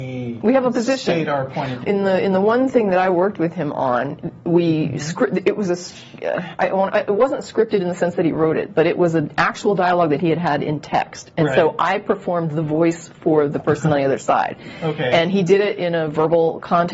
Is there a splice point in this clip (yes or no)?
yes